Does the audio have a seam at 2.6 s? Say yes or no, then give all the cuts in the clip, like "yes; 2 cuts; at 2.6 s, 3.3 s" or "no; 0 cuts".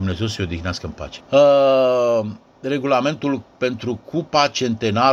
no; 1 cut; at 1.2 s